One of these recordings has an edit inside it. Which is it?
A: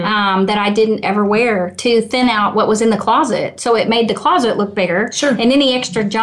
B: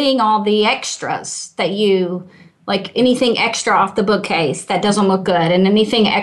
A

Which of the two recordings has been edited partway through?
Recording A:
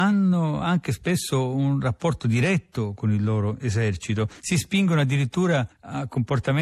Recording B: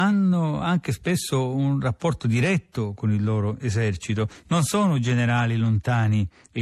A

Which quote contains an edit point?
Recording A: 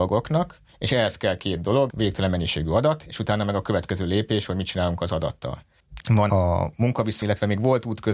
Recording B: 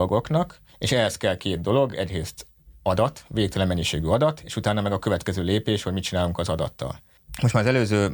A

